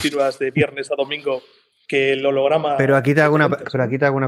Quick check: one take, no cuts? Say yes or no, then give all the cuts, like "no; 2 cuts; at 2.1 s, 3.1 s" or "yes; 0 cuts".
yes; 0 cuts